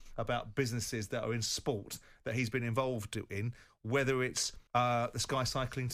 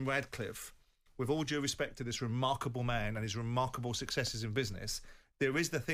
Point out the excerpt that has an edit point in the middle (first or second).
first